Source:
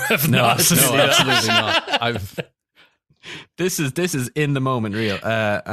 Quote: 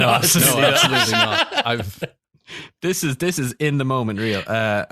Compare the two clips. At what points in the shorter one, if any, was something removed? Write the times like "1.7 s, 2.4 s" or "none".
2.2 s